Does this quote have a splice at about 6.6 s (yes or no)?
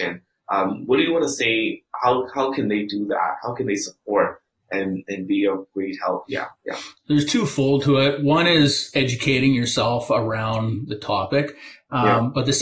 yes